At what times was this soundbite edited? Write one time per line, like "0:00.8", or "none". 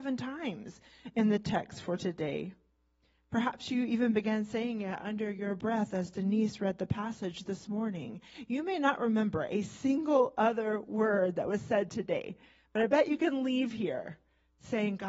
none